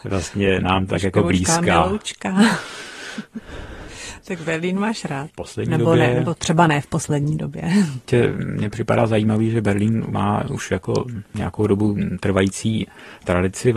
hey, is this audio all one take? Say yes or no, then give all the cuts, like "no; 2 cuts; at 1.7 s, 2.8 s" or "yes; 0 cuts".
no; 1 cut; at 5.3 s